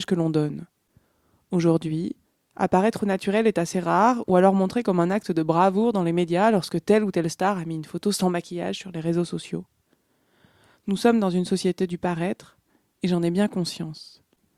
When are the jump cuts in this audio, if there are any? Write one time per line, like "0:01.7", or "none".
none